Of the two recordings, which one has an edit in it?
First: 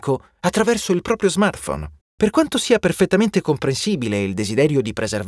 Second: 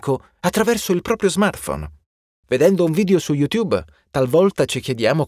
first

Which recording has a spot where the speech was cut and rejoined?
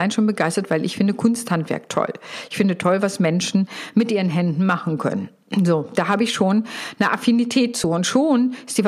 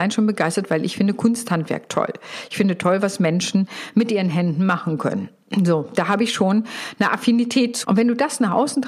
second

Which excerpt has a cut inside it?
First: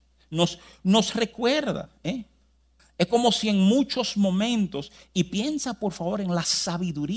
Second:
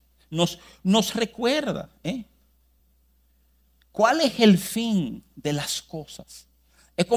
first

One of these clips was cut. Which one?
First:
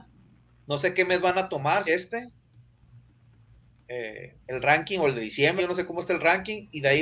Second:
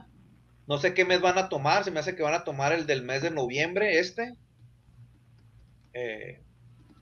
first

